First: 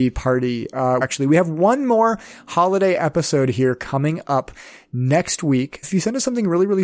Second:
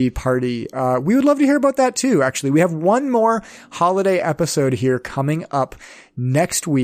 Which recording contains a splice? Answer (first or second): first